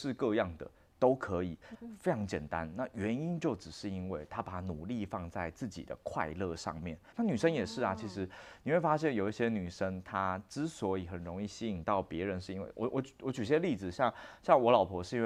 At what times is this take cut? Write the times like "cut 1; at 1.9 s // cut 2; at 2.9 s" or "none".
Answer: cut 1; at 1.7 s // cut 2; at 7.1 s